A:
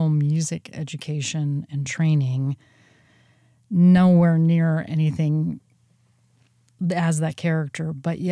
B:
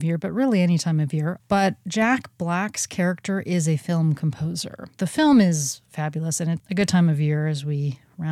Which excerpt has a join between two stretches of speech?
B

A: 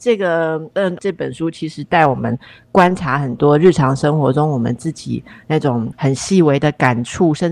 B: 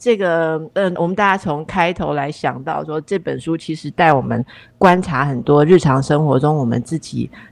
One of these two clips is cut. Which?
A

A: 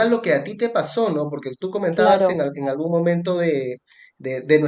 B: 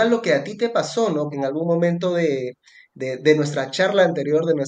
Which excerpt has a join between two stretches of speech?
B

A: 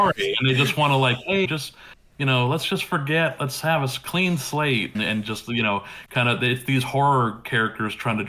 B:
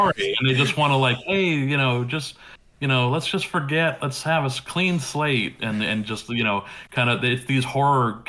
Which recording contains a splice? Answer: A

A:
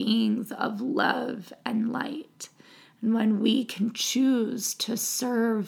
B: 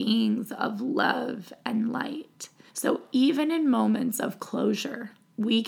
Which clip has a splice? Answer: B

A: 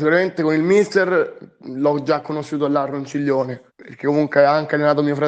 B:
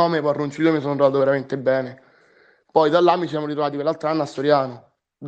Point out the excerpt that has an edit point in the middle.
A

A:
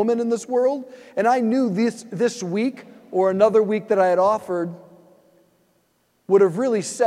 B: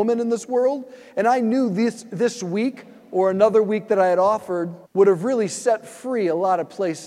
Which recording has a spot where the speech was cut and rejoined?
B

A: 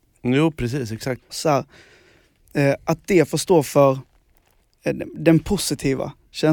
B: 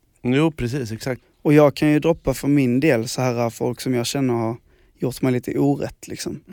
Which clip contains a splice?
A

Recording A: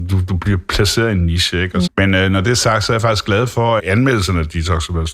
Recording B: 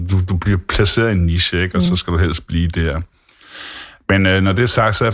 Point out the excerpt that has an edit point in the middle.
A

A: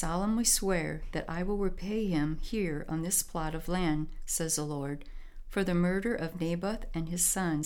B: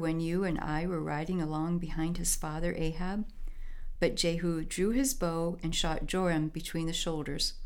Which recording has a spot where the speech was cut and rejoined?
B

